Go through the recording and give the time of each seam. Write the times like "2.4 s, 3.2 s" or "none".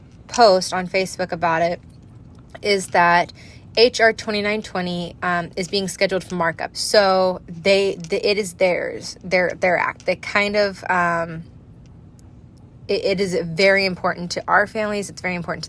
6.7 s